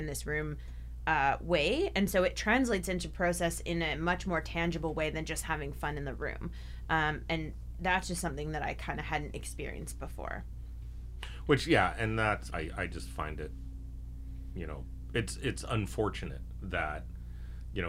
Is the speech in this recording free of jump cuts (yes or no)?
no